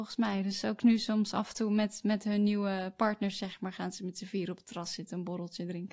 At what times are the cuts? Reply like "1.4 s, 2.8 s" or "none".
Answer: none